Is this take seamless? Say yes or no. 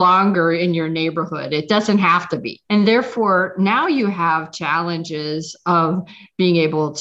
no